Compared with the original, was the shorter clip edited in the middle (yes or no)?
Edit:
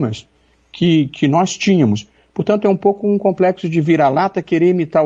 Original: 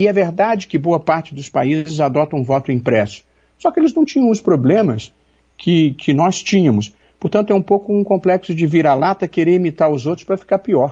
no